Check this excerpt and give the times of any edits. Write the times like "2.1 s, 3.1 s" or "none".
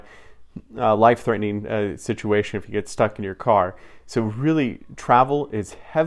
none